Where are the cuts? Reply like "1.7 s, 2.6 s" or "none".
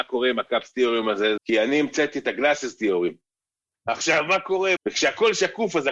1.4 s, 3.7 s, 4.8 s